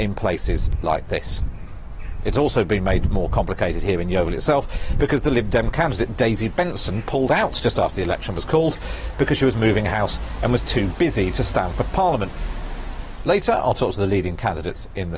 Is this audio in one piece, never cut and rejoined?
yes; 0 cuts

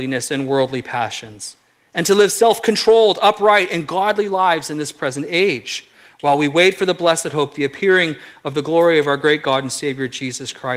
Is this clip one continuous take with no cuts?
yes; 0 cuts

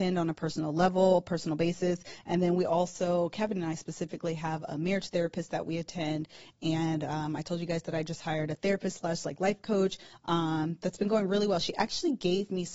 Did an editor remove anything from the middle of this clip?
no; 0 cuts

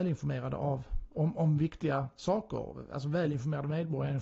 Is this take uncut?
yes; 0 cuts

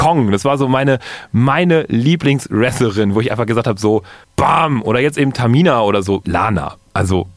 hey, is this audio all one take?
no; 2 cuts; at 4.2 s, 6.2 s

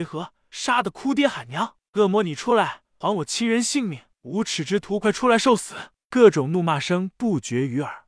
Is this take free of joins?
no; 1 cut; at 5.0 s

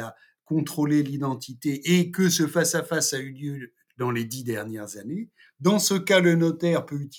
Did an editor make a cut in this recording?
no; 0 cuts

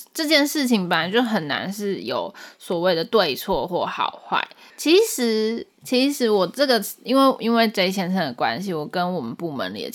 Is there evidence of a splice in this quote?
yes; 1 cut; at 4.7 s

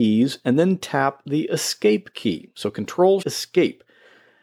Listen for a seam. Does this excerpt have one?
yes; 1 cut; at 3.2 s

